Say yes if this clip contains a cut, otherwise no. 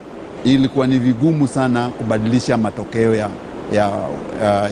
no